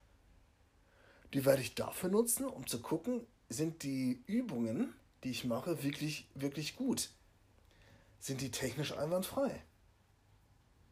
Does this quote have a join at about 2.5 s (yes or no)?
no